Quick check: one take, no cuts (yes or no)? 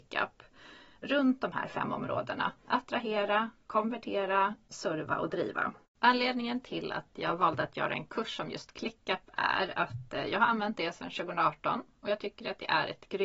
no